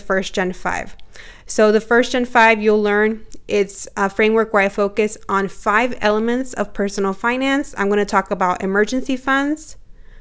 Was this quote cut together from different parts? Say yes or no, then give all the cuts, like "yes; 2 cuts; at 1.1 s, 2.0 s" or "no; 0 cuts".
no; 0 cuts